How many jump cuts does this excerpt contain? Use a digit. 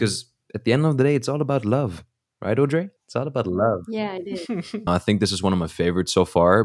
2